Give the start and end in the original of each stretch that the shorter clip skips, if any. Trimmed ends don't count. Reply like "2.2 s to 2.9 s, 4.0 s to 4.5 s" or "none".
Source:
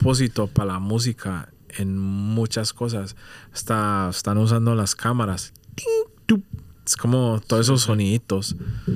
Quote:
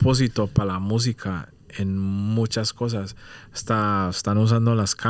none